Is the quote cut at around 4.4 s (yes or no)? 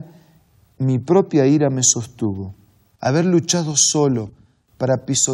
no